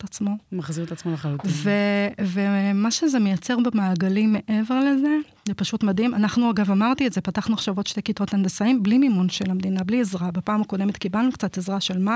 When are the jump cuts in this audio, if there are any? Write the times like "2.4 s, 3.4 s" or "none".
none

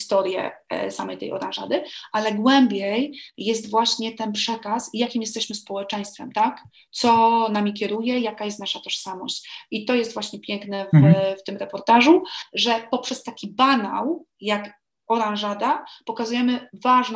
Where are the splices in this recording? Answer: none

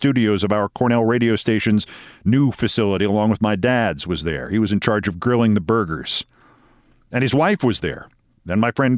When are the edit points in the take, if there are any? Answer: none

